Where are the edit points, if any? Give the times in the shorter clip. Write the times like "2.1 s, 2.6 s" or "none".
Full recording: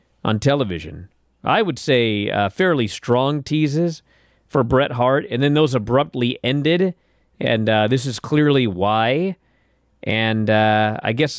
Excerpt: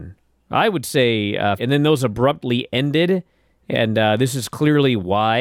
1.6 s